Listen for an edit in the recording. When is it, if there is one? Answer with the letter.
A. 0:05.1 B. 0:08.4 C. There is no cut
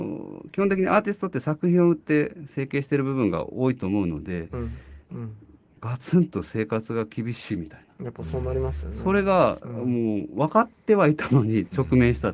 A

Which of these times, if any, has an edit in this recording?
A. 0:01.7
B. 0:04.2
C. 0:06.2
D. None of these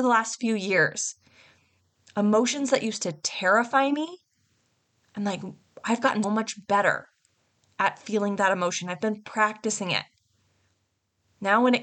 C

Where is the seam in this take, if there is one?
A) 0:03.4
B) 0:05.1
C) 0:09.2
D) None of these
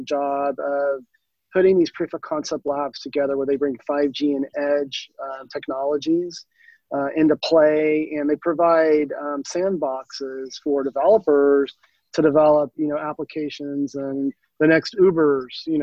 D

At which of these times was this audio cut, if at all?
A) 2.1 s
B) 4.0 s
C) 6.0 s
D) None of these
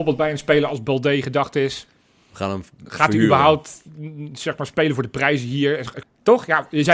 C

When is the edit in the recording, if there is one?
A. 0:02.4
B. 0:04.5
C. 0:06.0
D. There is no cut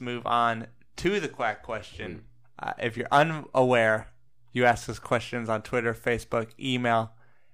D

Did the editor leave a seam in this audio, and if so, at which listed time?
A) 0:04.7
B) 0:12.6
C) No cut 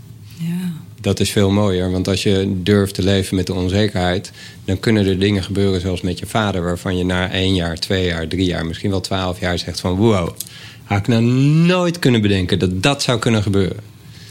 C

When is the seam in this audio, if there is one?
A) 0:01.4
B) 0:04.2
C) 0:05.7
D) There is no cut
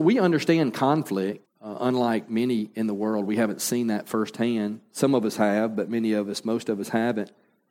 A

